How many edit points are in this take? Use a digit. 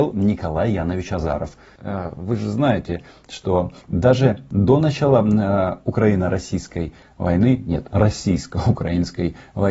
1